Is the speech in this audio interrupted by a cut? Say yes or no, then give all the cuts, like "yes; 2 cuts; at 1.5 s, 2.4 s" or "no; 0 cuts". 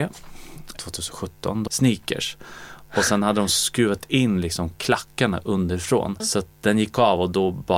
yes; 2 cuts; at 1.7 s, 6.2 s